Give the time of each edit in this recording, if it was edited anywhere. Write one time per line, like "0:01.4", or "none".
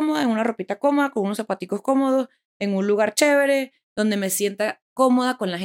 none